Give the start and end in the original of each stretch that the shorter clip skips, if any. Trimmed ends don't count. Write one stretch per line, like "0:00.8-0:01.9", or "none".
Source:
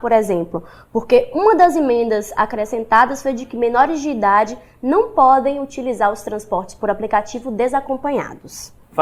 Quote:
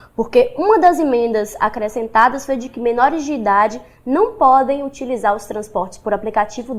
none